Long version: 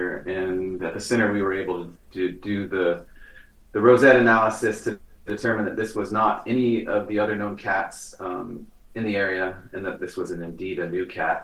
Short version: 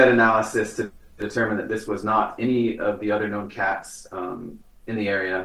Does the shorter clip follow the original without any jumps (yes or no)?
yes